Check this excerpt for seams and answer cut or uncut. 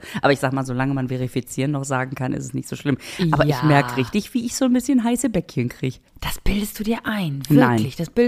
cut